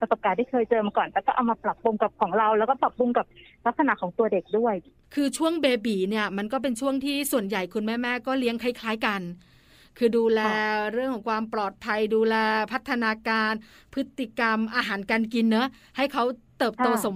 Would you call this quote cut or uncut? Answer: uncut